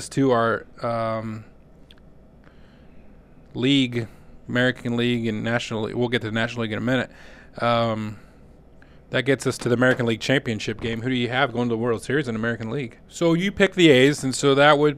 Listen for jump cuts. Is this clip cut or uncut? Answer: cut